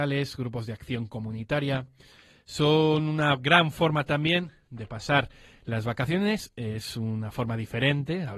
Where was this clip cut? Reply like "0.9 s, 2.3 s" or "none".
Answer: none

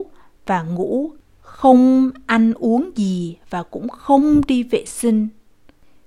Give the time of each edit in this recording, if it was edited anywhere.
none

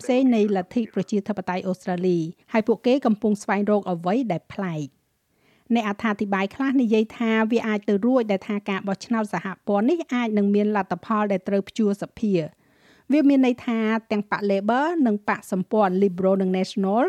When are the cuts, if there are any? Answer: 2.4 s

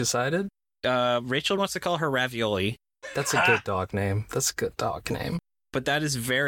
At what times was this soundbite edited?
1.6 s

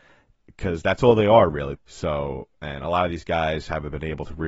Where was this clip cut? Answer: 1.8 s

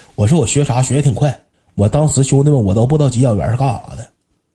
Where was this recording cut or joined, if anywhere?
1.5 s

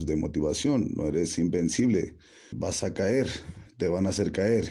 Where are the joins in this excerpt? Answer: 2.5 s

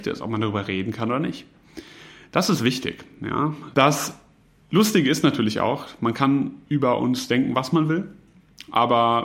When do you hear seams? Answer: 3.7 s

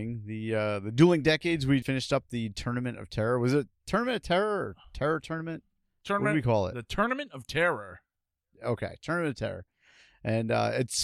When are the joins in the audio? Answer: 1.8 s

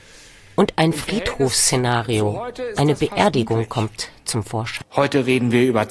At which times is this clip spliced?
4.8 s

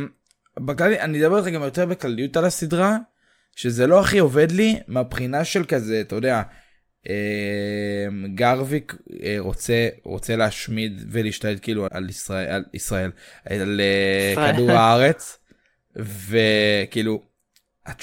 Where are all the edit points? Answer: 11.9 s

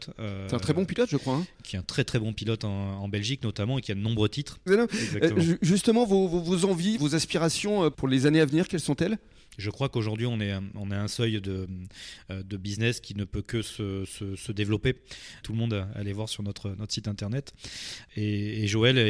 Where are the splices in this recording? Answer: 4.7 s, 15.4 s

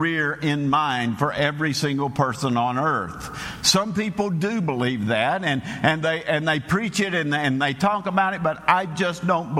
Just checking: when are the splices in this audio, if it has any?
none

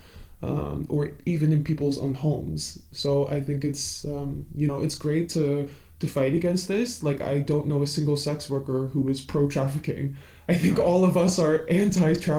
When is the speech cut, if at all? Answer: none

